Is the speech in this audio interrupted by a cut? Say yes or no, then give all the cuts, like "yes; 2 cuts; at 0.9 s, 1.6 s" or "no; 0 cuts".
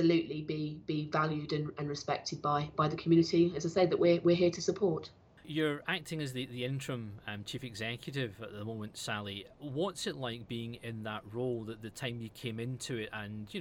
no; 0 cuts